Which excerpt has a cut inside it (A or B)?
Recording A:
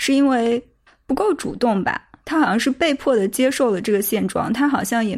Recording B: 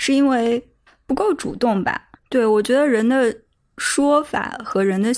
B